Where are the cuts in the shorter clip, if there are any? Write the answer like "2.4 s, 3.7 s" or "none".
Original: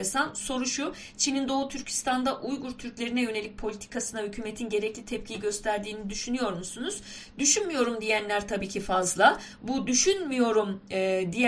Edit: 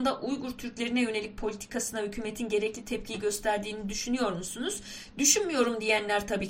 none